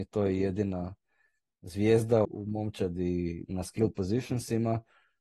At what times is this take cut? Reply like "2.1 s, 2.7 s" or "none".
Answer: 2.2 s